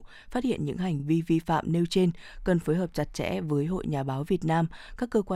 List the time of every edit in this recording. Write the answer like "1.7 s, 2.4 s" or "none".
none